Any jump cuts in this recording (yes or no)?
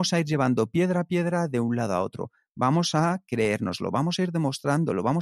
no